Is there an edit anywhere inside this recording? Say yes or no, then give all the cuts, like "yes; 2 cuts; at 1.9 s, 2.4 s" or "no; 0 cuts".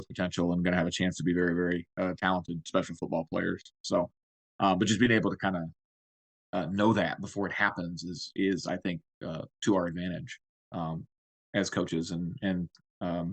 no; 0 cuts